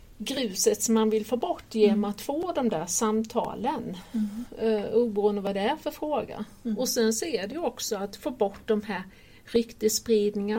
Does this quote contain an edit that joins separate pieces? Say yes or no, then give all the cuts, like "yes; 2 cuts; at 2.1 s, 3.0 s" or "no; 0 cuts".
no; 0 cuts